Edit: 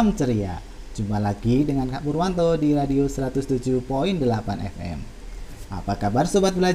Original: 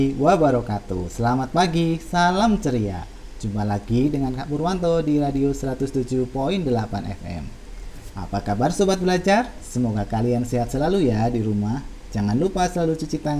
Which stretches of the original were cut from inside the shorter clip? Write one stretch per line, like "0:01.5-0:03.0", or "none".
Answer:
none